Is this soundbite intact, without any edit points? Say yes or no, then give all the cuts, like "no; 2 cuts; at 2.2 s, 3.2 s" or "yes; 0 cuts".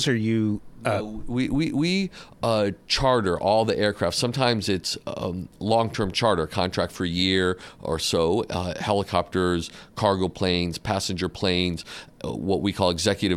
yes; 0 cuts